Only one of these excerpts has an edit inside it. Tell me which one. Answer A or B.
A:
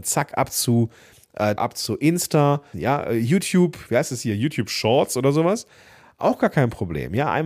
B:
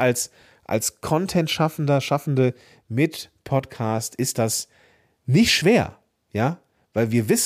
A